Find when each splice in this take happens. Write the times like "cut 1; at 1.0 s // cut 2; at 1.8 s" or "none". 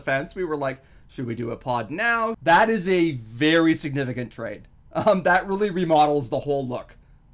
cut 1; at 2.3 s